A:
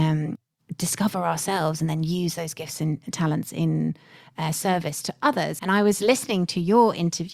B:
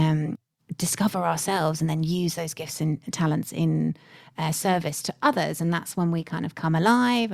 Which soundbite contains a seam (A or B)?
A